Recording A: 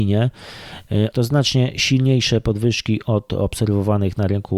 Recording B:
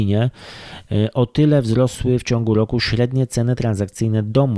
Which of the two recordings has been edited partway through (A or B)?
A